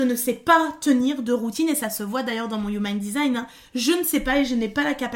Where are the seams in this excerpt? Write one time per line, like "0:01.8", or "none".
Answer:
none